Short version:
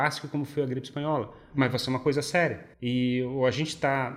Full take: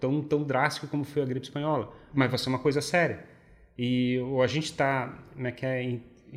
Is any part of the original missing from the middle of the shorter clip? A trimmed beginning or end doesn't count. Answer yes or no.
yes